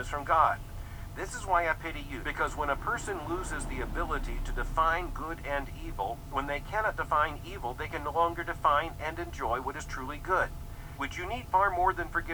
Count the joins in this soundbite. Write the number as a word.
three